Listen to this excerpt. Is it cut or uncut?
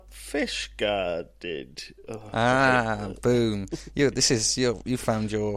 uncut